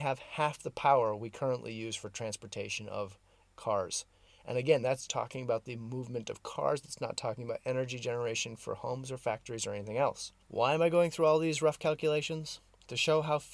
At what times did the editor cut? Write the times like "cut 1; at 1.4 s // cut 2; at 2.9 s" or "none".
cut 1; at 5.1 s // cut 2; at 10.4 s

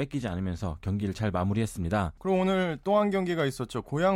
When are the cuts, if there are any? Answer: cut 1; at 2.2 s

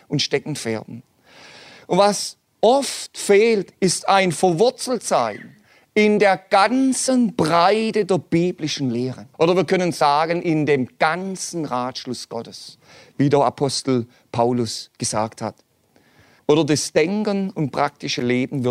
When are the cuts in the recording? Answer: cut 1; at 9.3 s // cut 2; at 16.4 s

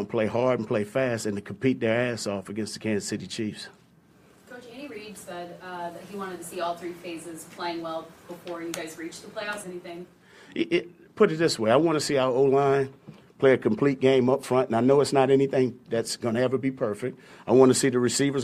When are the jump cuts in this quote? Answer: cut 1; at 9.6 s

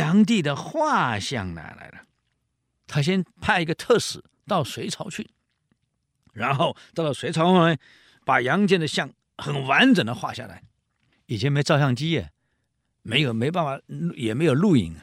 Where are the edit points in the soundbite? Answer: none

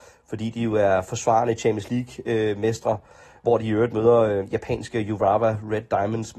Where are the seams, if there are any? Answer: none

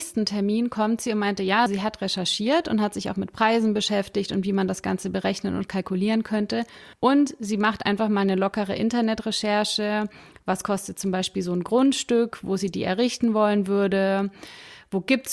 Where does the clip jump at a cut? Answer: cut 1; at 1.7 s // cut 2; at 6.9 s

